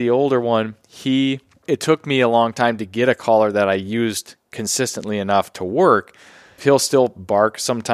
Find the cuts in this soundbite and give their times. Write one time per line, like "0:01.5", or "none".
0:01.7
0:06.6